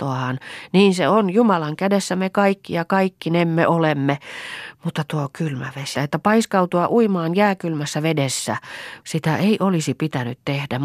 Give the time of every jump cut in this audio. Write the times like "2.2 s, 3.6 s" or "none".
6.0 s, 9.0 s